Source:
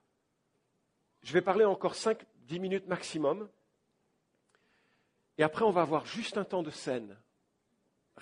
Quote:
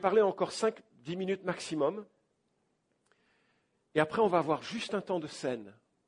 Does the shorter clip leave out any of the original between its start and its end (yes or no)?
no